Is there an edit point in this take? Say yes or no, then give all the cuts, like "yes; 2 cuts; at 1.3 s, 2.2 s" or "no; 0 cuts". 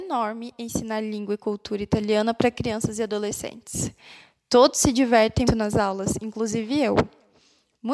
yes; 1 cut; at 5.5 s